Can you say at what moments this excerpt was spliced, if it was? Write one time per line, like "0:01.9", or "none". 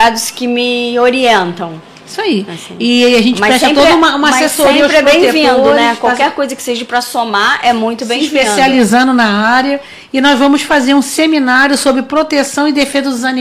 none